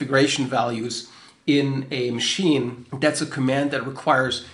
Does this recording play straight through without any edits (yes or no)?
no